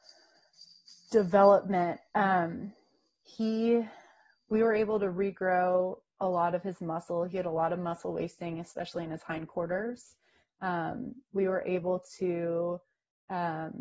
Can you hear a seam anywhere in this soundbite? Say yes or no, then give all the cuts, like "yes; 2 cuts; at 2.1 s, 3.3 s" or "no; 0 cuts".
no; 0 cuts